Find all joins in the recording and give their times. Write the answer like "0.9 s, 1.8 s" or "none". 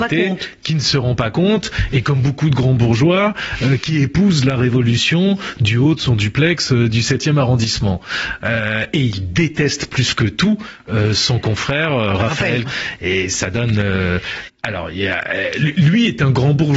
12.6 s, 14.5 s